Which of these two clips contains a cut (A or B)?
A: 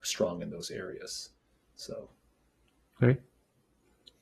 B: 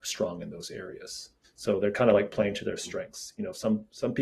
B